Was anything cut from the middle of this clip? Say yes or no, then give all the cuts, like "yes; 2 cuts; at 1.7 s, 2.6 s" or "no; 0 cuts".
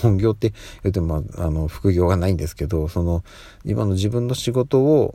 no; 0 cuts